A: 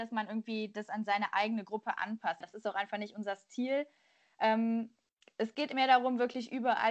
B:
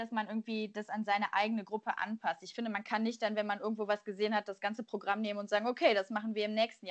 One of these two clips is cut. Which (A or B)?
A